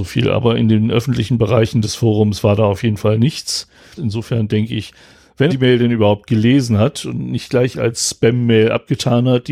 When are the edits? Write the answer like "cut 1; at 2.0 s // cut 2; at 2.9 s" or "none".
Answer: cut 1; at 4.0 s // cut 2; at 5.5 s